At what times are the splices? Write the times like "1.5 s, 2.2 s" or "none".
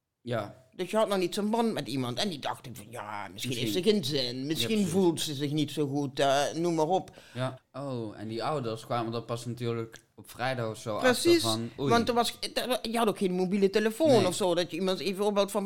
7.6 s